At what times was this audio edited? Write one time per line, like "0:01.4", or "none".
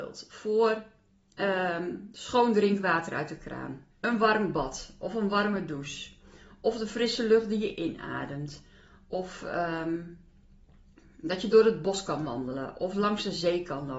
0:03.9